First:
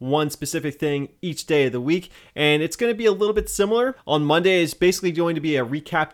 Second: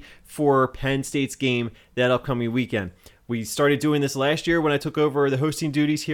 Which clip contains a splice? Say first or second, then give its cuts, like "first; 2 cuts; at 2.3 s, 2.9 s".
first; 1 cut; at 4.0 s